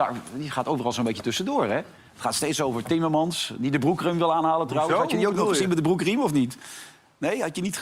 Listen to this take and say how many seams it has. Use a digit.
0